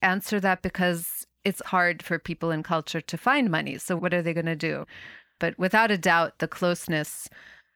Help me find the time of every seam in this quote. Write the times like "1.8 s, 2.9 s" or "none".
1.6 s, 5.4 s